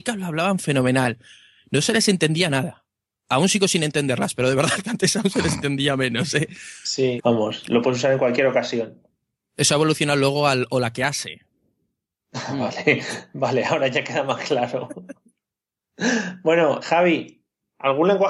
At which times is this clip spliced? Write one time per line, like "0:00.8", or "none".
0:07.2
0:16.8